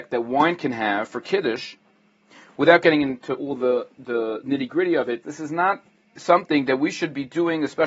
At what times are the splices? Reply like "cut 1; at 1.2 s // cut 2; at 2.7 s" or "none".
cut 1; at 5.2 s